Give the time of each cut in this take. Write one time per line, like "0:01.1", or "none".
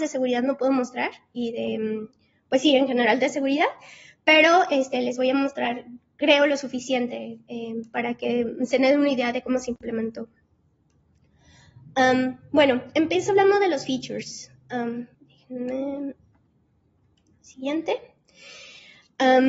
0:15.1